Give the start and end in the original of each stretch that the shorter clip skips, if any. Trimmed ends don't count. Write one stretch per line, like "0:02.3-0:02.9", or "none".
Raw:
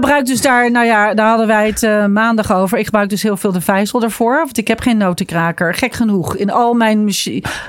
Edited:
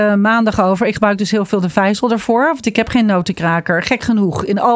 none